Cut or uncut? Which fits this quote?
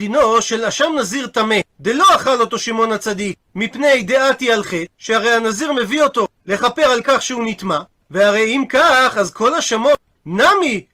uncut